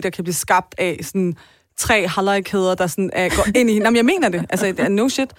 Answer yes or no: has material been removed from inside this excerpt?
no